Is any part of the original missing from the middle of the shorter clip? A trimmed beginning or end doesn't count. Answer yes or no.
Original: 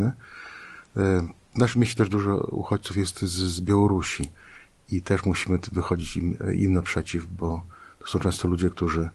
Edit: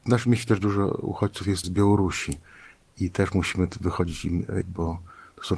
yes